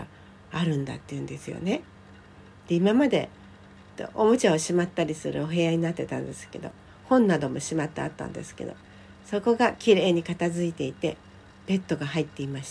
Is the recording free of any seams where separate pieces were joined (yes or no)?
no